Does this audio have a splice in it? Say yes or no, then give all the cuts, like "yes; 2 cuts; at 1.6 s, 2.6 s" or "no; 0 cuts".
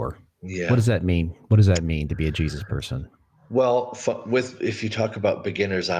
no; 0 cuts